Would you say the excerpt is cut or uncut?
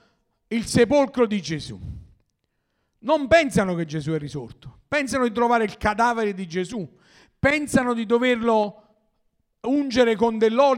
uncut